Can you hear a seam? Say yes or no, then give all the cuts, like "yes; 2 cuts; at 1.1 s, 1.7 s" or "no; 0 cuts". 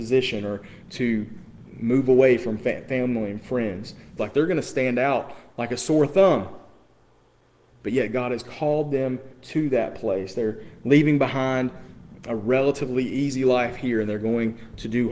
yes; 1 cut; at 4.2 s